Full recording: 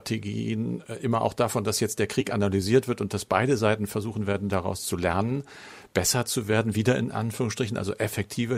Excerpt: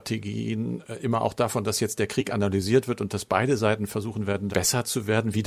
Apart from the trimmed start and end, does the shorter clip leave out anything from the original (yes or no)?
yes